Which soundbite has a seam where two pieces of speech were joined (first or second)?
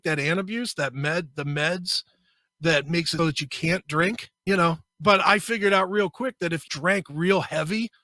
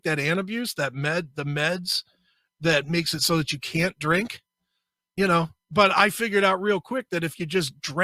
first